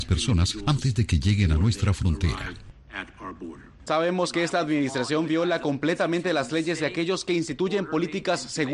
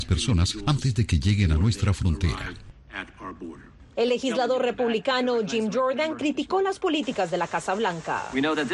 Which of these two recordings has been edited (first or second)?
first